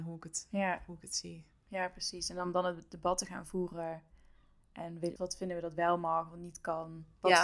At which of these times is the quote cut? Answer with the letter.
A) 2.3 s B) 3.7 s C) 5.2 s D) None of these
C